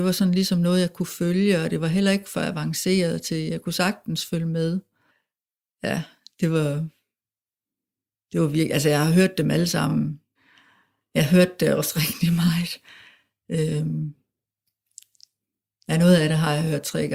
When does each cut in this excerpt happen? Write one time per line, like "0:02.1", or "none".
none